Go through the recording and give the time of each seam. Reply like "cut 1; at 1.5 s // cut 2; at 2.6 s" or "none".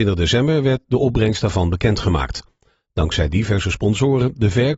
cut 1; at 2.8 s

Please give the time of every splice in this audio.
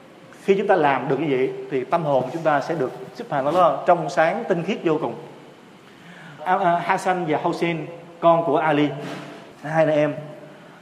cut 1; at 6.4 s // cut 2; at 9.5 s

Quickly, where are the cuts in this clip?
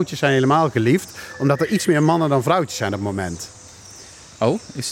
none

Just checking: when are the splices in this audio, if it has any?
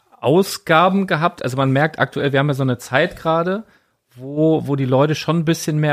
none

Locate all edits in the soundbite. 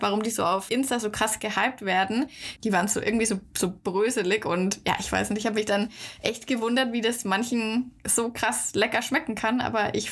cut 1; at 2.6 s

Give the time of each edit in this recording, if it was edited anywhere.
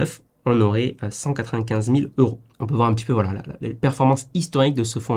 none

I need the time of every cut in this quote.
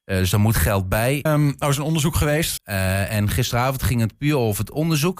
cut 1; at 1.3 s // cut 2; at 2.6 s

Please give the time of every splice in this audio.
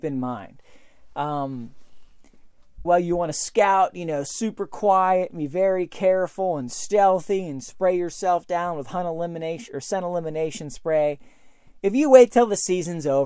cut 1; at 2.8 s

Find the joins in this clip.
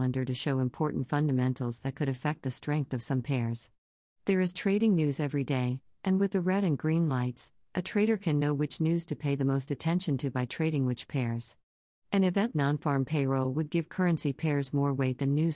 cut 1; at 12.5 s

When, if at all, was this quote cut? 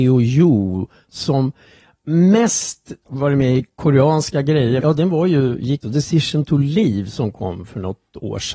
cut 1; at 4.8 s // cut 2; at 5.8 s

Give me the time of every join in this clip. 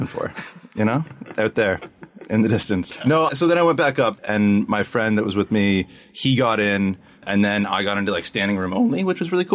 none

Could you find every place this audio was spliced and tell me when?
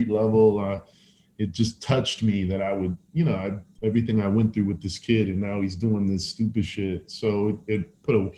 none

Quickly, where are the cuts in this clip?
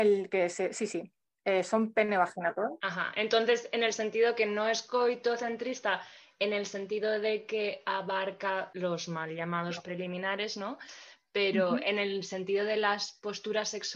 none

